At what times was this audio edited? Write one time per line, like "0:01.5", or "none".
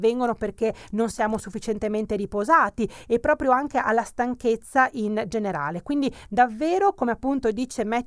none